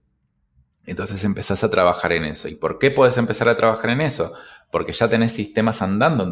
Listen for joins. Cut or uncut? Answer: uncut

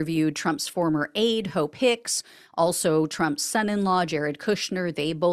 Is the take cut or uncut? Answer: uncut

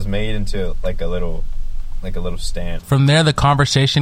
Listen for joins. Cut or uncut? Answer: cut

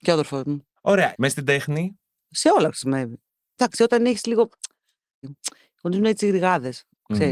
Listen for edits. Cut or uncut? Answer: cut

